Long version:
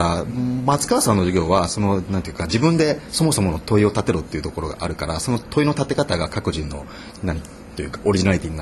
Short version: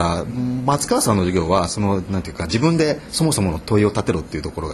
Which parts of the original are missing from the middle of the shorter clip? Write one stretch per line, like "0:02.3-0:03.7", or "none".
none